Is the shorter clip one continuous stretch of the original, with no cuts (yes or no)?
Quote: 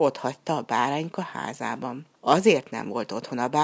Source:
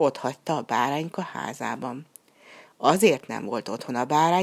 no